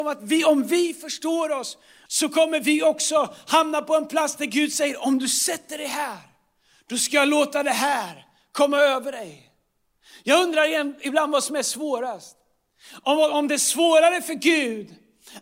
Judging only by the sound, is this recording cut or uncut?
cut